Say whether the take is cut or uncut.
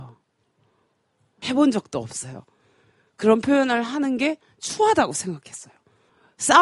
uncut